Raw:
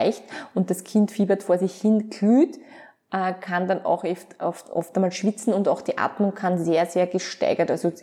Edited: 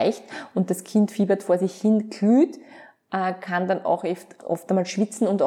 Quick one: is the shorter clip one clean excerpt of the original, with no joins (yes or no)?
no